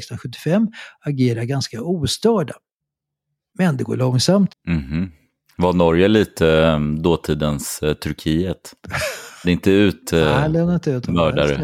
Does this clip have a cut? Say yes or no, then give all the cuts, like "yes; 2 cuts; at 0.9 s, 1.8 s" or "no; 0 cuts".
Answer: yes; 2 cuts; at 4.5 s, 9.4 s